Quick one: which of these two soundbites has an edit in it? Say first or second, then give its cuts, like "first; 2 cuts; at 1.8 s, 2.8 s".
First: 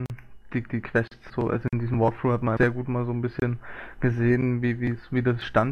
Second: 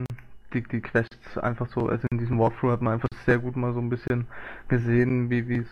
first; 2 cuts; at 1.3 s, 2.6 s